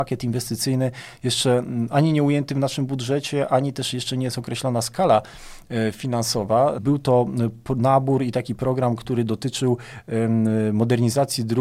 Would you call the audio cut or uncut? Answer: cut